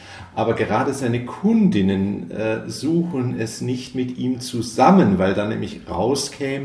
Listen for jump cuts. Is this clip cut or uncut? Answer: uncut